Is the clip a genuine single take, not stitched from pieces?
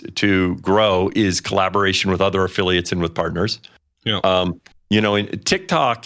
no; 1 cut; at 4.7 s

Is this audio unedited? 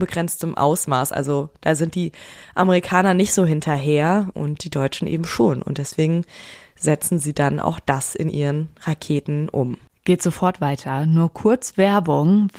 no; 1 cut; at 4.3 s

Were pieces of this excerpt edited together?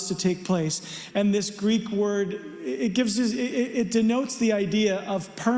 yes; 1 cut; at 1.1 s

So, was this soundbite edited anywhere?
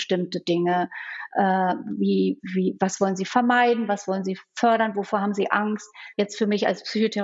yes; 1 cut; at 6.1 s

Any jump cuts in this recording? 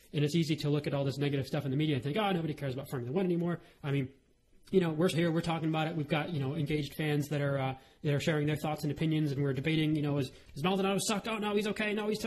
yes; 1 cut; at 5.1 s

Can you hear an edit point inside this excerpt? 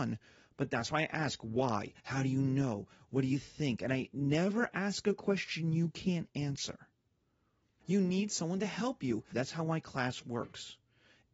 yes; 3 cuts; at 2.0 s, 7.8 s, 9.3 s

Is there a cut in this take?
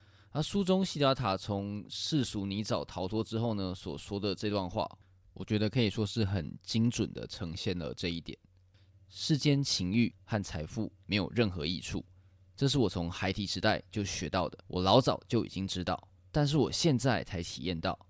yes; 2 cuts; at 14.6 s, 16.2 s

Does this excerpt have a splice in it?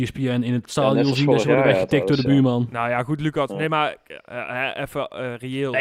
no; 0 cuts

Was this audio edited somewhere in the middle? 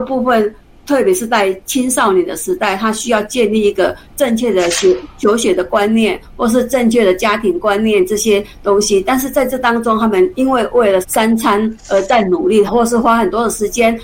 yes; 2 cuts; at 11.0 s, 12.7 s

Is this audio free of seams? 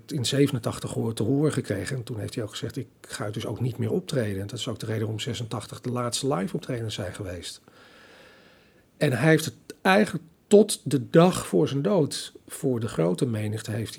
yes; 0 cuts

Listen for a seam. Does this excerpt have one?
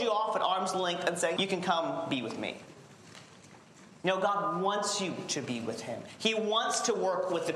yes; 1 cut; at 1.4 s

